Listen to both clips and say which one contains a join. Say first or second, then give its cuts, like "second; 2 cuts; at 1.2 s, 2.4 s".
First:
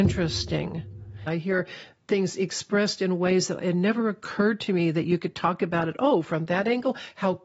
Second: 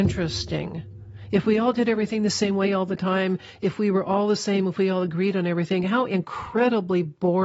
first; 1 cut; at 1.3 s